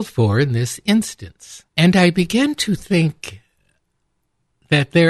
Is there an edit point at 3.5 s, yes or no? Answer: no